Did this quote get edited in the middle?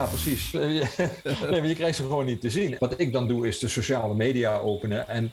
yes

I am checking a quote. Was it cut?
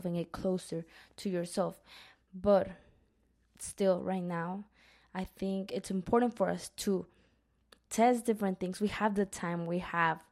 no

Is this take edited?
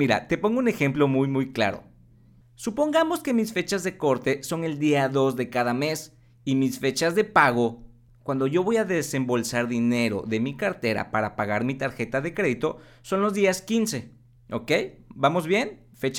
no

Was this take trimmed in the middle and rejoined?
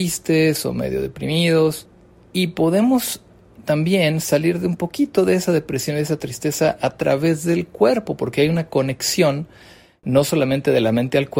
no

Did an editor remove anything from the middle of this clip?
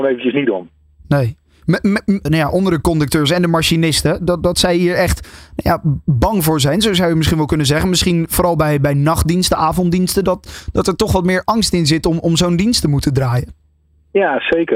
yes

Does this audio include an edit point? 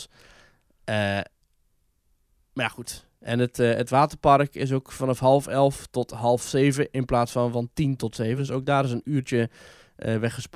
no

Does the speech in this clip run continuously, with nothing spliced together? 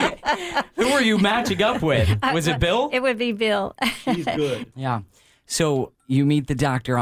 no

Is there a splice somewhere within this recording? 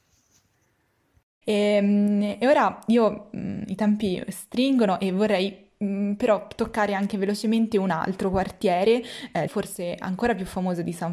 yes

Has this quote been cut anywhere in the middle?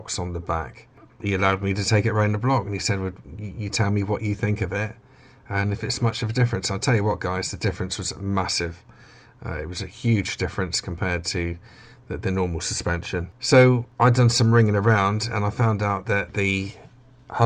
no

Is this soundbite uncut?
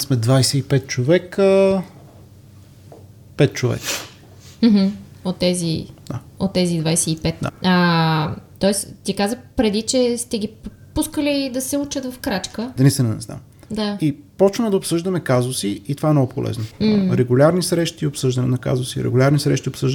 no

